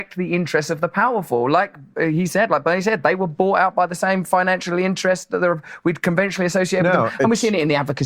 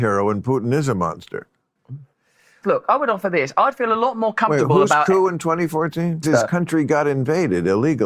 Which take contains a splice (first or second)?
second